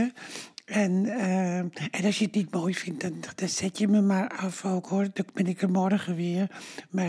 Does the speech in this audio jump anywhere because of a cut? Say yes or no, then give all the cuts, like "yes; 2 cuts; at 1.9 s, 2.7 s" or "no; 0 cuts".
no; 0 cuts